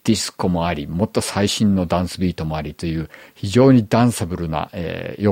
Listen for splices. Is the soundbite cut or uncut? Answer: uncut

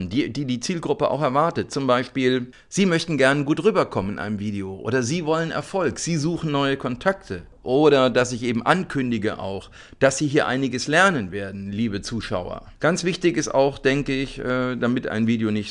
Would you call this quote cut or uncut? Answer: cut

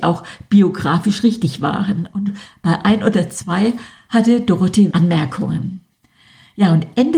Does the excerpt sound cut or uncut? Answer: cut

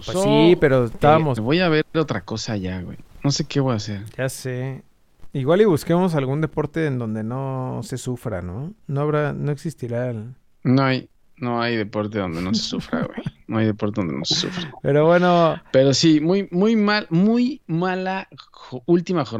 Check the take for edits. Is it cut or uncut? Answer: cut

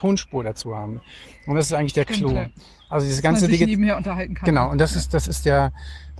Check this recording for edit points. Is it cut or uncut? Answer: uncut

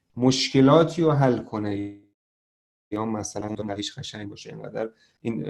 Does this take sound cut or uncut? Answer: uncut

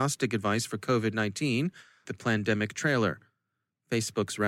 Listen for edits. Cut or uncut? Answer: cut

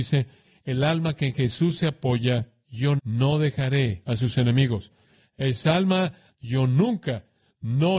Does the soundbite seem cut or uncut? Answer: cut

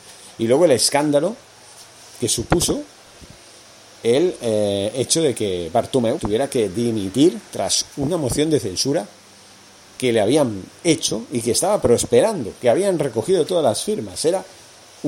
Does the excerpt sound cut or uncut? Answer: cut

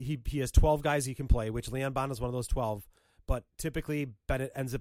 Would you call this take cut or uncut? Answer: uncut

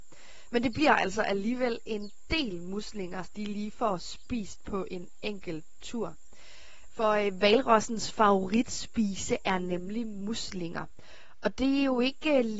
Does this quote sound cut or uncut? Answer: cut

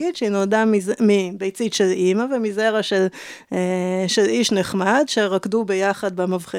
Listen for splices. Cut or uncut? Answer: uncut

